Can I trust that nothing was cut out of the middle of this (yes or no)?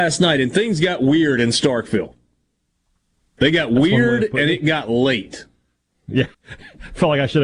no